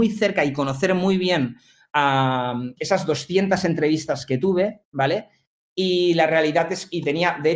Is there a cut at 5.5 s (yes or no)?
no